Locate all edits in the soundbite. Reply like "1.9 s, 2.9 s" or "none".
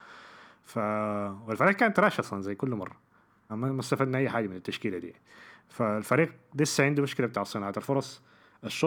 3.5 s

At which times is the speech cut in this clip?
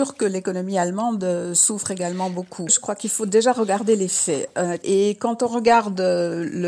2.7 s, 4.8 s

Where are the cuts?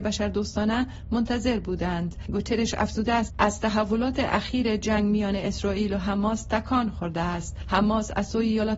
none

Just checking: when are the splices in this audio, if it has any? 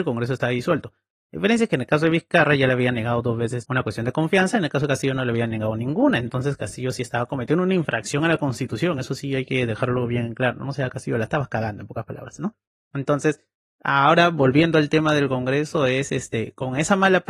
none

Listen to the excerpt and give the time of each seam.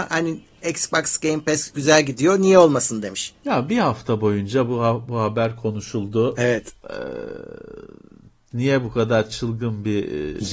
3.4 s

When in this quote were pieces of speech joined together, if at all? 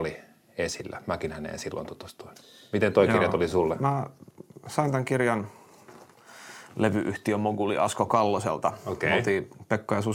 none

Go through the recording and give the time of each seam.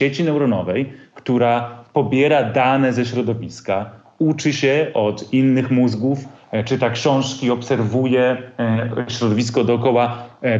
none

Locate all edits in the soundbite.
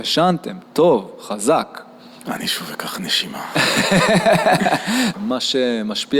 2.2 s, 5.1 s

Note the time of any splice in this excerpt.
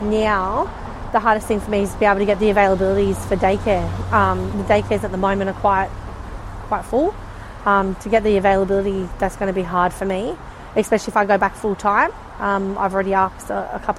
4.5 s

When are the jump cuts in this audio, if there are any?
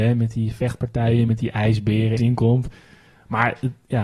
2.2 s

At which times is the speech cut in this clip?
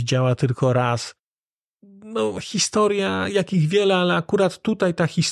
none

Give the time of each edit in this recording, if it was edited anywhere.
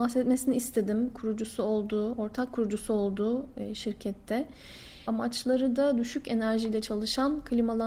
5.1 s

